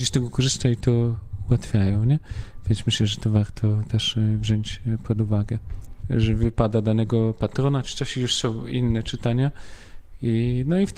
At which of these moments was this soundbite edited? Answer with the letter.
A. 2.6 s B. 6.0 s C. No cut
B